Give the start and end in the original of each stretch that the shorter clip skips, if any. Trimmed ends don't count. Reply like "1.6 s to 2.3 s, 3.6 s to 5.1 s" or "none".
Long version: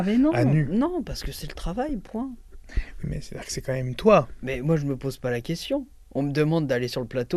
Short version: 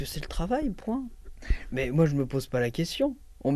3.0 s to 4.4 s